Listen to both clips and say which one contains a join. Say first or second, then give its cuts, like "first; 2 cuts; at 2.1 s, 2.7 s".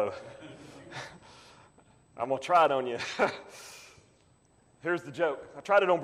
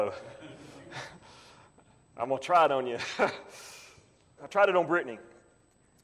second; 1 cut; at 4.4 s